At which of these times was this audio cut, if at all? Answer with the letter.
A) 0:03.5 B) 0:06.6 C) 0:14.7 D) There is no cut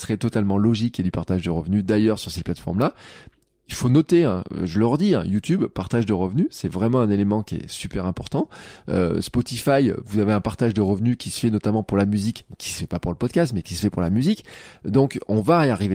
D